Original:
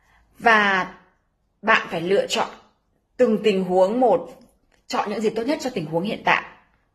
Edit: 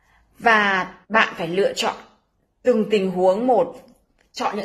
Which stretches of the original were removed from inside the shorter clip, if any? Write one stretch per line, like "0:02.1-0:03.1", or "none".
0:01.0-0:01.6